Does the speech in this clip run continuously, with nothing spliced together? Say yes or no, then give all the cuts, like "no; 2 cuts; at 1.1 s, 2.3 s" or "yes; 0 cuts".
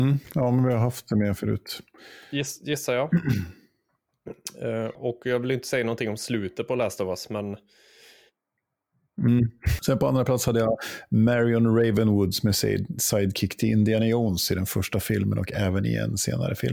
no; 2 cuts; at 4.9 s, 9.8 s